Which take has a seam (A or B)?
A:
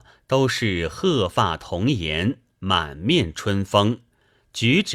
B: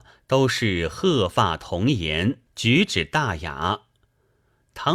B